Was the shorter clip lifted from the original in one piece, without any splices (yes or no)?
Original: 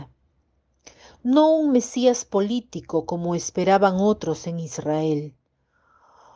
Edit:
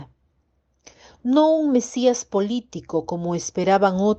yes